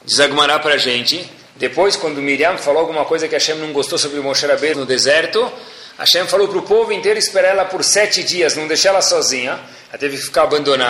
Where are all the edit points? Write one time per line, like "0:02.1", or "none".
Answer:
0:04.7